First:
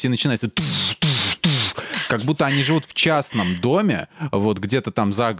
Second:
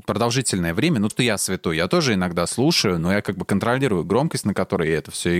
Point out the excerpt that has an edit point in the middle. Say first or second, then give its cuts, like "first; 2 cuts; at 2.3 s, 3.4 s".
second; 1 cut; at 1.1 s